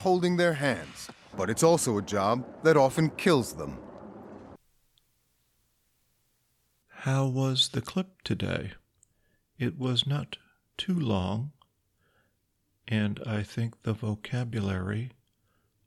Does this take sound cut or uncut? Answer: cut